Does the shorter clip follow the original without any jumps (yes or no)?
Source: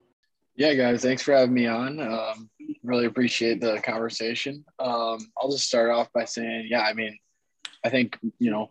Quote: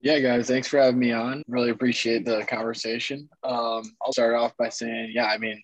no